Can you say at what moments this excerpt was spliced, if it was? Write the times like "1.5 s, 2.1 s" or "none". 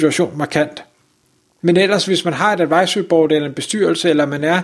1.6 s

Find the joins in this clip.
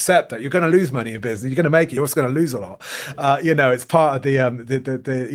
none

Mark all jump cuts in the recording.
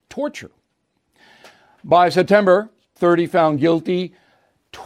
3.0 s

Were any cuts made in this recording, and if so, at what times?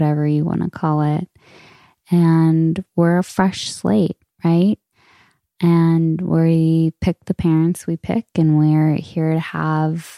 none

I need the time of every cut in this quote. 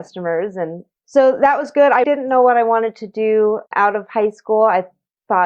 2.0 s, 3.7 s

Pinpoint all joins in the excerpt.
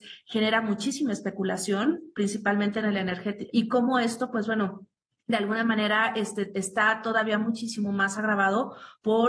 3.5 s

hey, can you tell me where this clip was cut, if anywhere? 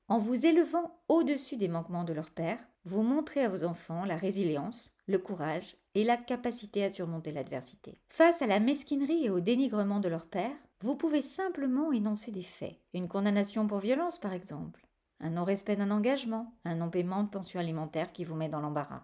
none

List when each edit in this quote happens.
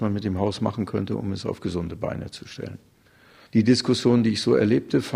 3.5 s

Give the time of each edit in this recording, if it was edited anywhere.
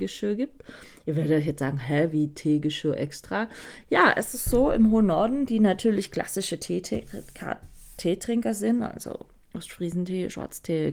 none

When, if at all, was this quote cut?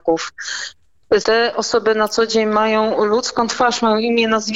1.2 s

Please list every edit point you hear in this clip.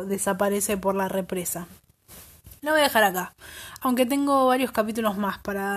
none

